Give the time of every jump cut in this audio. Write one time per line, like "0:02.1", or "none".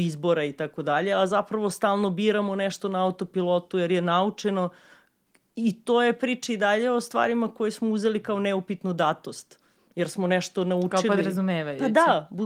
none

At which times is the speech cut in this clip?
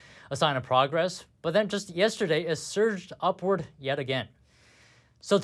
none

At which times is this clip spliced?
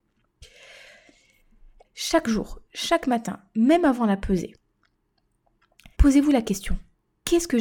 0:01.8
0:05.9

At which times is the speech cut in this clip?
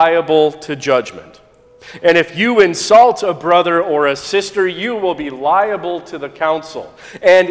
none

